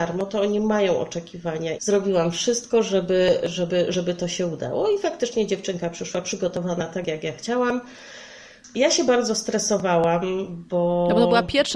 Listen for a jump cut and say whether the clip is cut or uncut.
cut